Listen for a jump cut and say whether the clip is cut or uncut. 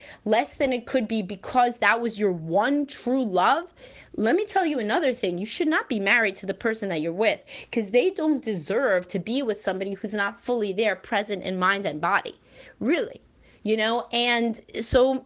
uncut